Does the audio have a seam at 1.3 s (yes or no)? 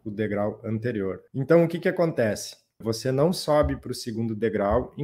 yes